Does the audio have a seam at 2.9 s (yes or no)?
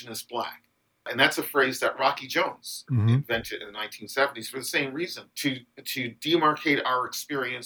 yes